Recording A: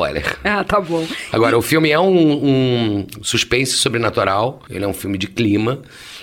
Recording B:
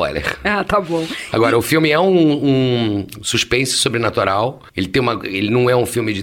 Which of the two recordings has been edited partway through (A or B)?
A